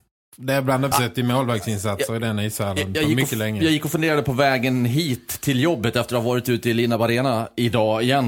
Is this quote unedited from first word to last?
no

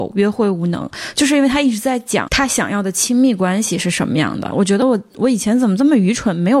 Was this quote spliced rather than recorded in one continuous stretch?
yes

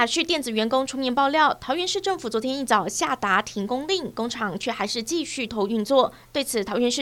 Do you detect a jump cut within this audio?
yes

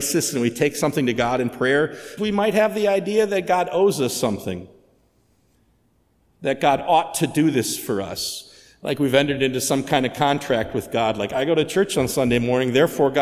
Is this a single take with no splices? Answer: no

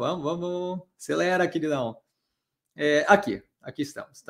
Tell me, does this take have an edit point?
no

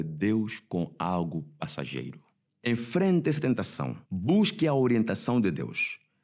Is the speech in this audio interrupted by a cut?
yes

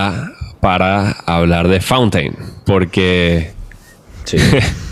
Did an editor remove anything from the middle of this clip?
yes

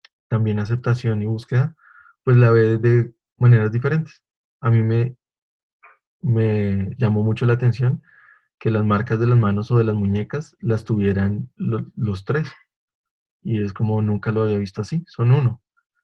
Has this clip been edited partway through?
no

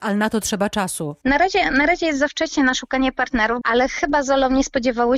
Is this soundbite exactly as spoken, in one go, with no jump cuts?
no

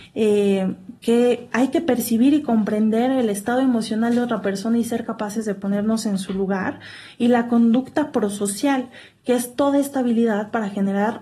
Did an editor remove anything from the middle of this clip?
no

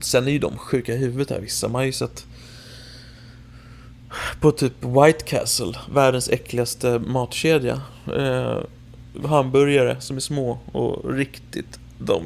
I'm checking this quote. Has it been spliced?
no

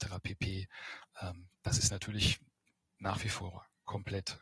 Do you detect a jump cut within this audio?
no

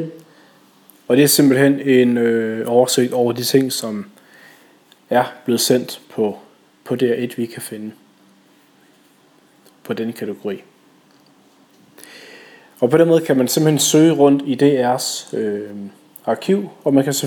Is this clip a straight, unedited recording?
yes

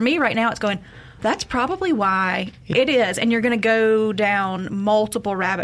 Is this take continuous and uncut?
no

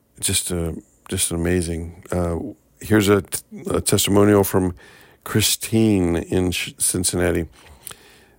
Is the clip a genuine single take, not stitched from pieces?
yes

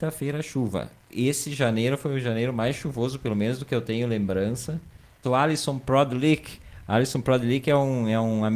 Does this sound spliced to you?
yes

